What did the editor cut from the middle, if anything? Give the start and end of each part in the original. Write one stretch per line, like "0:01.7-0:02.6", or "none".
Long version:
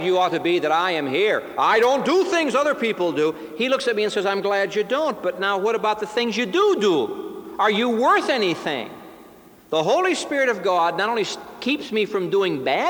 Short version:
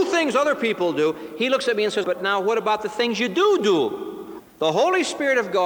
0:04.2-0:05.2
0:07.6-0:09.5

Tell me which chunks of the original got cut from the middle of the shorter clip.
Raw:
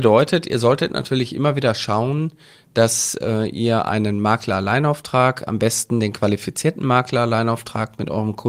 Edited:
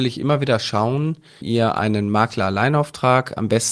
0:02.6-0:03.5

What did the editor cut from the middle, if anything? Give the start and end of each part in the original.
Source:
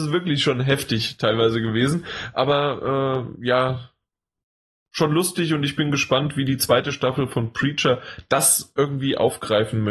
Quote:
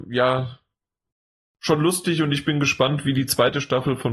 none

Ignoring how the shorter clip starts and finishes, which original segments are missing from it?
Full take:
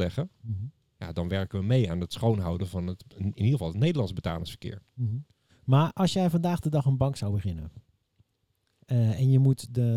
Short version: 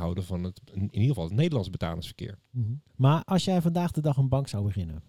0:05.3-0:05.6

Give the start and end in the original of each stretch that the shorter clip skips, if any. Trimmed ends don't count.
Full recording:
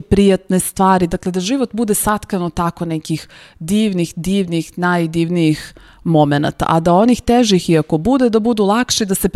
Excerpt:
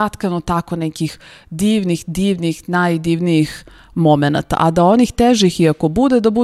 none

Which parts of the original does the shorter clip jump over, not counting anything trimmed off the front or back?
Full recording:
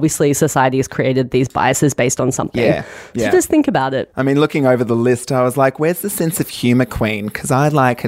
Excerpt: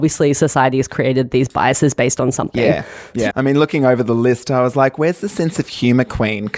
0:03.3-0:04.1

